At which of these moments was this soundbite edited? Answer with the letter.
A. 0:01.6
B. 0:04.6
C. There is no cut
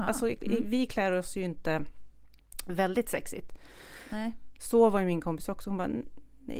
B